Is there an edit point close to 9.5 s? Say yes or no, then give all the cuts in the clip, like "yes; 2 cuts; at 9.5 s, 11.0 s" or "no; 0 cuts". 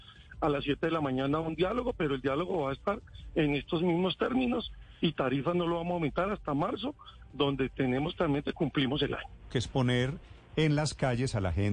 yes; 1 cut; at 9.5 s